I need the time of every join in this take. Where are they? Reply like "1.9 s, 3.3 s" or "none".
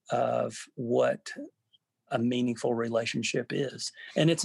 2.1 s